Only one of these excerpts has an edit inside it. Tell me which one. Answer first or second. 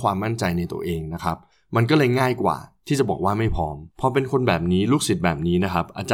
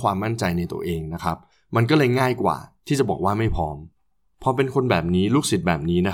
first